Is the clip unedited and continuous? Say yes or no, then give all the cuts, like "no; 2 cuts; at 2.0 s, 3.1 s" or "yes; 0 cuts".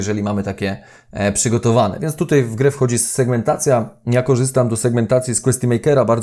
yes; 0 cuts